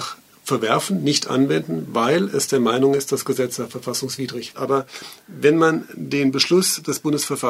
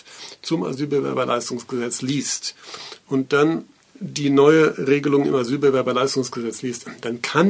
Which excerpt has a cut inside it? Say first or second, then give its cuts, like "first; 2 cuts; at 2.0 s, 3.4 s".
first; 1 cut; at 4.5 s